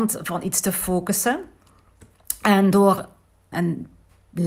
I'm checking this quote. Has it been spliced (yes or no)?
yes